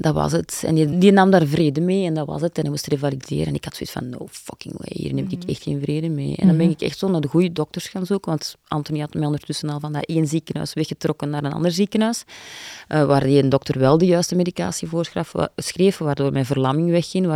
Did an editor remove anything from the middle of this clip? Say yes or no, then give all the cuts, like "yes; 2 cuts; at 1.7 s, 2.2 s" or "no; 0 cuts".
yes; 1 cut; at 0.9 s